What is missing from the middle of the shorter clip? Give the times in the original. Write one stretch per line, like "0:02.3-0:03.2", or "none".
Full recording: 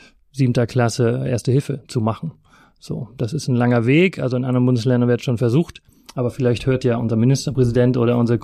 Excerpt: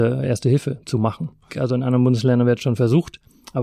0:02.5-0:04.1